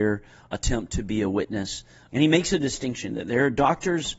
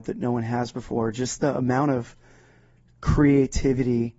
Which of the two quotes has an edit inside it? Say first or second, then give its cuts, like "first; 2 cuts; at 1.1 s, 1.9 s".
first; 1 cut; at 2.1 s